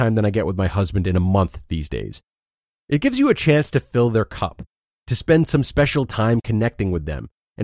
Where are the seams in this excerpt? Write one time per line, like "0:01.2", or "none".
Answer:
0:02.8